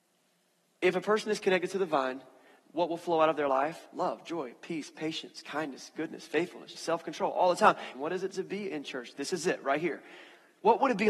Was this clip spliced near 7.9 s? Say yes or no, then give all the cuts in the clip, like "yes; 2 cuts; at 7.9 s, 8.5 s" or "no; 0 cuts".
yes; 2 cuts; at 6.7 s, 7.9 s